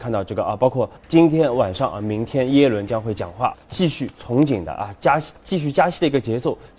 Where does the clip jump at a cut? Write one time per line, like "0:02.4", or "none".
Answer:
0:01.0
0:03.5